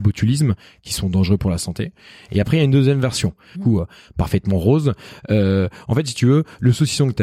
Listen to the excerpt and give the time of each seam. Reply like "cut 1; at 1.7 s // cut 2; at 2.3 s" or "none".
cut 1; at 3.5 s